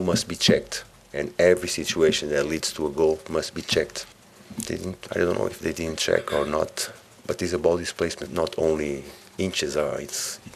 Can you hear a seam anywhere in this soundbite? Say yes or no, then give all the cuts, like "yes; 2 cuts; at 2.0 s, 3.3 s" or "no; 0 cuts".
yes; 1 cut; at 8.3 s